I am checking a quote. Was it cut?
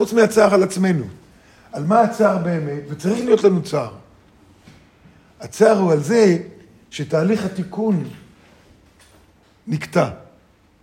no; 0 cuts

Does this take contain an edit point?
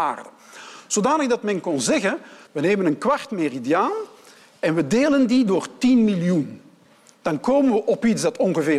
yes; 1 cut; at 2.5 s

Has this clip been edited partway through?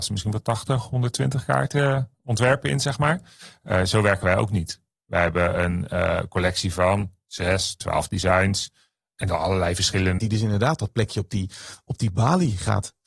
yes; 1 cut; at 10.2 s

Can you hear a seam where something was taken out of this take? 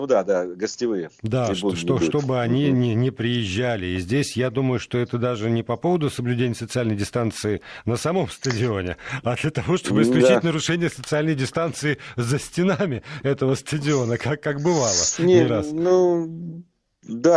no; 0 cuts

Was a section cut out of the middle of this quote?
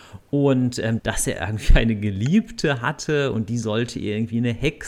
yes; 1 cut; at 1.0 s

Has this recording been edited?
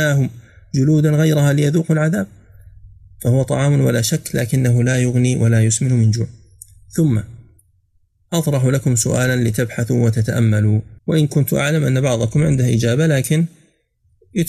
yes; 1 cut; at 11.0 s

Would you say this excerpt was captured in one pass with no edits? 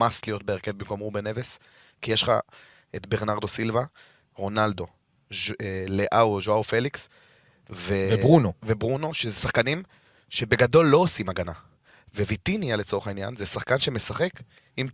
yes; 0 cuts

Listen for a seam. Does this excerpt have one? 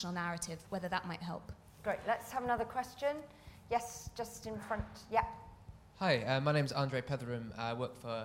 no; 0 cuts

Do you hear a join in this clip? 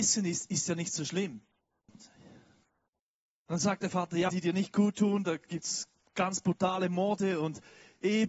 yes; 2 cuts; at 1.9 s, 4.3 s

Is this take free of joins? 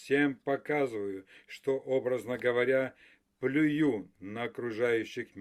yes; 0 cuts

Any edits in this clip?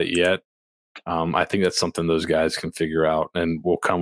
no; 0 cuts

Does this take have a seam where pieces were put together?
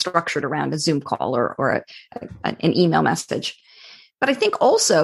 no; 0 cuts

